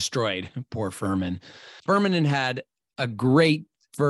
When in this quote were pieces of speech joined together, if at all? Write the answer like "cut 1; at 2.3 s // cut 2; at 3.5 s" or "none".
cut 1; at 1.8 s